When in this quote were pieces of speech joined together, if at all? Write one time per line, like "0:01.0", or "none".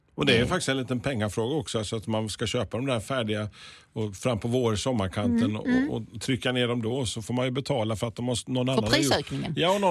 none